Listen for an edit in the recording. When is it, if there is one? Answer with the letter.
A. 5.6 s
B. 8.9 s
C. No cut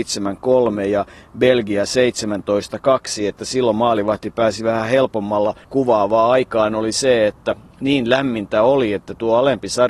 A